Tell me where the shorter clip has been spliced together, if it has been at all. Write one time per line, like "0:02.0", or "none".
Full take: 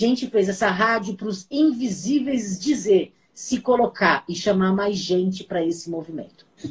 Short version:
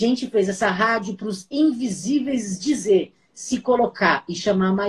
none